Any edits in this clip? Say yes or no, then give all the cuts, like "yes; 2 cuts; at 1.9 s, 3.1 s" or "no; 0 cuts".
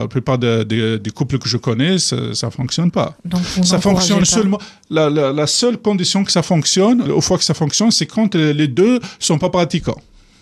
yes; 1 cut; at 7.1 s